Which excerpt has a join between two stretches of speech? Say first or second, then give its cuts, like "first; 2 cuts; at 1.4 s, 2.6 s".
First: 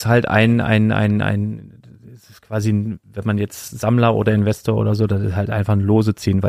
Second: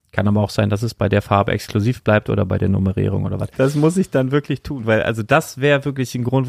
second; 1 cut; at 3.5 s